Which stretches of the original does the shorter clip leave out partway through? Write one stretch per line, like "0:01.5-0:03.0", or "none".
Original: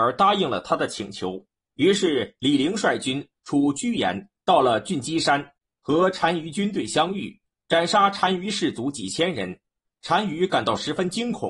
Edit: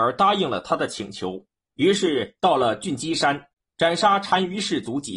0:02.4-0:04.4
0:05.7-0:07.5